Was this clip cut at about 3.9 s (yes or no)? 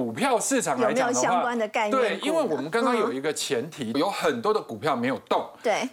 yes